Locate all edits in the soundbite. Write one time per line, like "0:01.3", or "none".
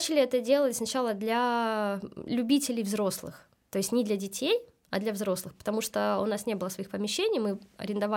none